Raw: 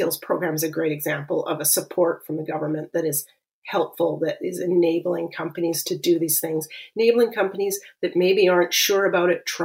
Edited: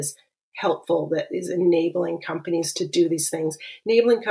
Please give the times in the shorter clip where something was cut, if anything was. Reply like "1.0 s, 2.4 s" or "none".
none

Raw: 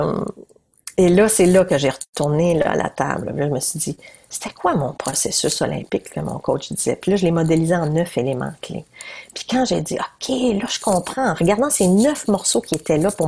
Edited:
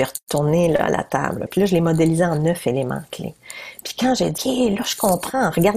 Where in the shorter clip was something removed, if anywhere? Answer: 1.5 s, 4.4 s

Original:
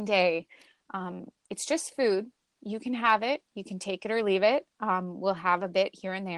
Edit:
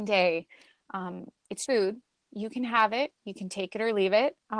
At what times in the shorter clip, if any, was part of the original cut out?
1.7 s

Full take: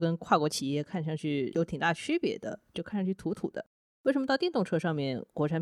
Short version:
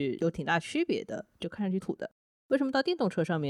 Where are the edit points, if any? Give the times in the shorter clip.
1.8 s

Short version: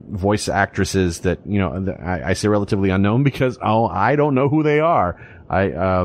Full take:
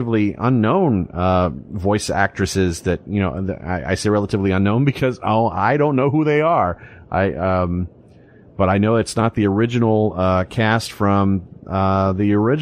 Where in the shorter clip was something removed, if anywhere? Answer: none

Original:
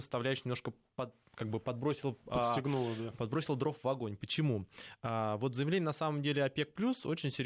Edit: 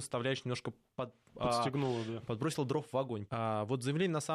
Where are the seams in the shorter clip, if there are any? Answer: 1.3 s, 3.3 s

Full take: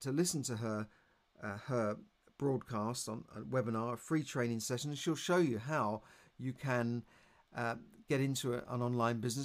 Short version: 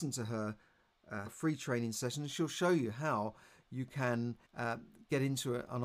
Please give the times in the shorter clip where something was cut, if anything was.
1.3 s, 4.4 s

